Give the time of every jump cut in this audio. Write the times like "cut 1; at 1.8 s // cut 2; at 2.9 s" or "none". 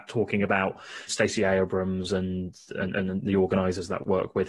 cut 1; at 1.1 s